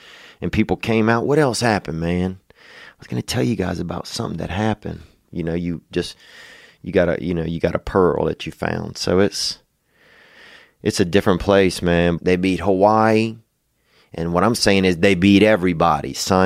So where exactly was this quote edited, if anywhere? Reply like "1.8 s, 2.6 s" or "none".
5.3 s, 12.2 s